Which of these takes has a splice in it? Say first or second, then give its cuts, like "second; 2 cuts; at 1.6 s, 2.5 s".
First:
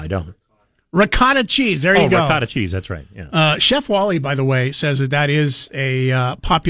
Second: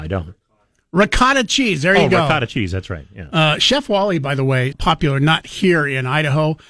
second; 1 cut; at 4.7 s